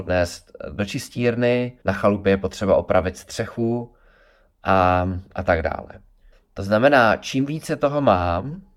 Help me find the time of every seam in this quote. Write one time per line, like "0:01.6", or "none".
0:01.8
0:06.3